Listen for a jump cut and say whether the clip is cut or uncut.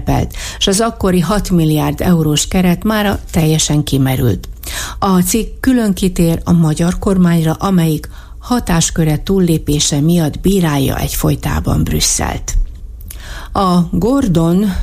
cut